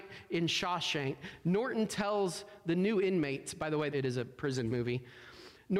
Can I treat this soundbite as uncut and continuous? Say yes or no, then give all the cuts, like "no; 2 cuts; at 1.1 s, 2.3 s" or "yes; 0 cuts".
no; 1 cut; at 3.9 s